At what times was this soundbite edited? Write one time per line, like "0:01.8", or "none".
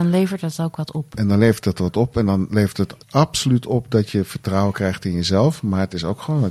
0:03.0